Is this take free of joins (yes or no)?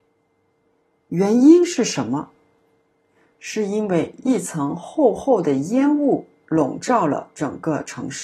yes